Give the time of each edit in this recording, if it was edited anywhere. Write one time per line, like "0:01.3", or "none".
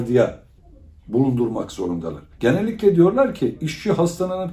0:02.3